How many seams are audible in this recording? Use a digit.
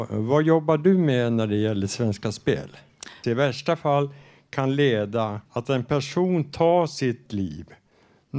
2